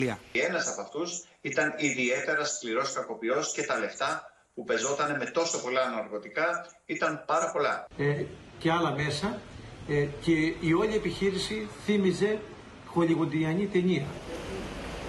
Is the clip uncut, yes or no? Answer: no